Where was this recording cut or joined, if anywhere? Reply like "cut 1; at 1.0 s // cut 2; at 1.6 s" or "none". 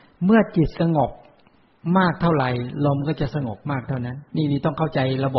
cut 1; at 4.3 s